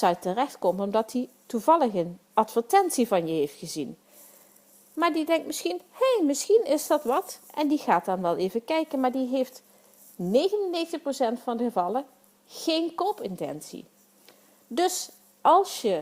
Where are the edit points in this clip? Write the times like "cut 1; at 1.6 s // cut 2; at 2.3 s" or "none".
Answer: none

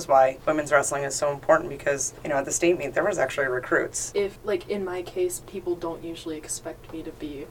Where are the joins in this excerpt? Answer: cut 1; at 4.1 s // cut 2; at 5.4 s

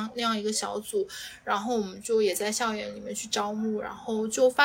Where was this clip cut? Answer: none

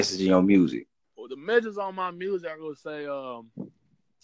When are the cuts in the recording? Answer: cut 1; at 1.0 s

